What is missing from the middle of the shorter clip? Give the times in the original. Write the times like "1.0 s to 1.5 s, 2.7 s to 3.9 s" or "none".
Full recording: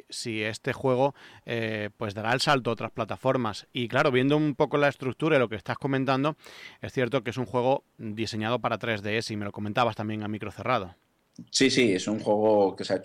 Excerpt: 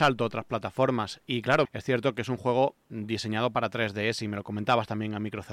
4.1 s to 6.7 s